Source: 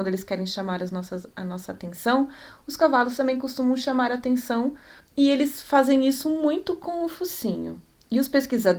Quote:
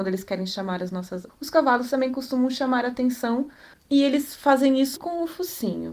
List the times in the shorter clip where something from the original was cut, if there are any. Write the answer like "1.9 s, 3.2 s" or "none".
1.3 s, 5.0 s